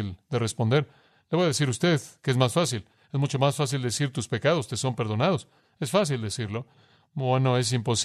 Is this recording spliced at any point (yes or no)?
no